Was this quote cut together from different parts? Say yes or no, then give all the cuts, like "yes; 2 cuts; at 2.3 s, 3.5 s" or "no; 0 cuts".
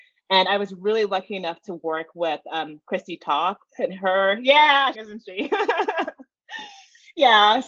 yes; 1 cut; at 4.9 s